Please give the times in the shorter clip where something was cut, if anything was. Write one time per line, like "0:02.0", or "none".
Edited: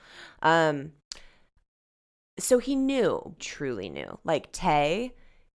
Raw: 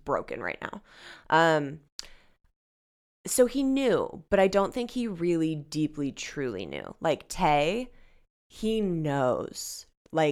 0:03.4